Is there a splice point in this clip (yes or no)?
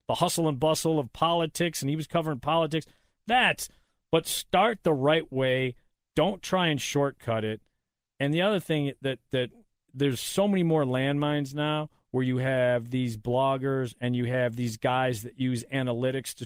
no